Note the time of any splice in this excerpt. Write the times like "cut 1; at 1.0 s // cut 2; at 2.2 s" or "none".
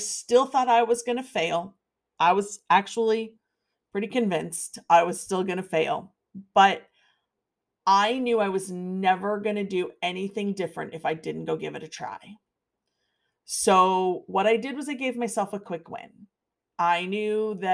none

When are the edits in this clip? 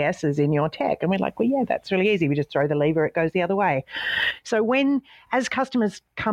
none

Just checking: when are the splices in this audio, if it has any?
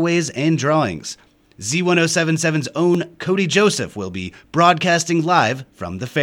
none

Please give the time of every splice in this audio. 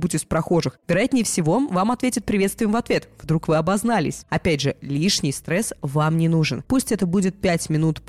cut 1; at 4.2 s // cut 2; at 6.7 s

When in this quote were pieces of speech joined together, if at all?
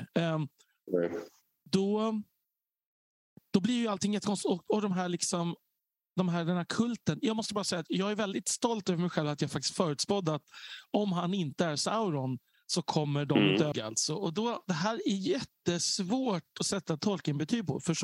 cut 1; at 13.7 s

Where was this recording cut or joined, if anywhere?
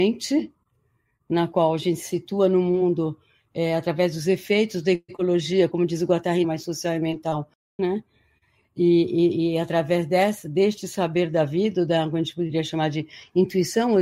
cut 1; at 6.4 s // cut 2; at 7.8 s

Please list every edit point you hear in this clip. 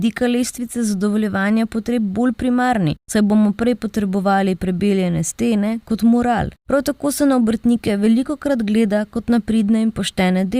cut 1; at 6.6 s

